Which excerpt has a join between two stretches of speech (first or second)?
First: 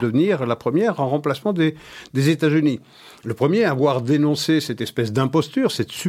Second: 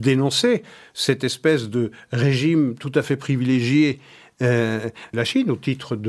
second